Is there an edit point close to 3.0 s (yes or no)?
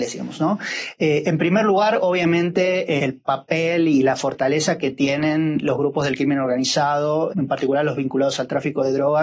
yes